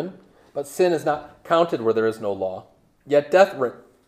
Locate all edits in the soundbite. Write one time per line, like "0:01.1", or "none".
none